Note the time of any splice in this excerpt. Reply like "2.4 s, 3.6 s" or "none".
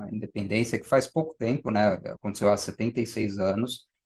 none